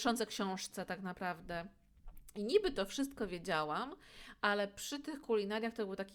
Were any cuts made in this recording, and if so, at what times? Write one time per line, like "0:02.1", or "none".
none